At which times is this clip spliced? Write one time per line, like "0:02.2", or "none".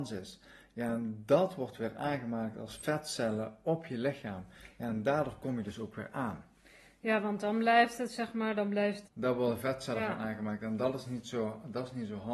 0:09.0